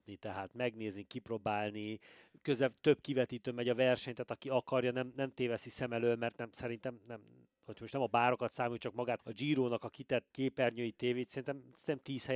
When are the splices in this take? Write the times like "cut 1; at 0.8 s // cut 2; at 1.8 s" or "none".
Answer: cut 1; at 9.2 s // cut 2; at 10.3 s